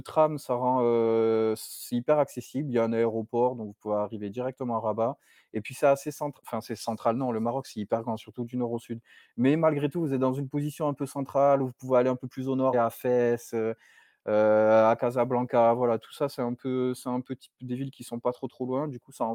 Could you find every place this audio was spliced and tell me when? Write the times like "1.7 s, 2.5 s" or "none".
12.7 s